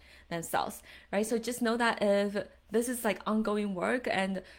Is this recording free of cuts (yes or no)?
yes